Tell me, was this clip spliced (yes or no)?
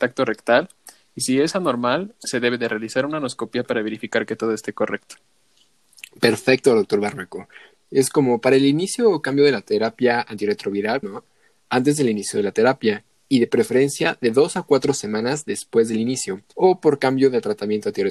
yes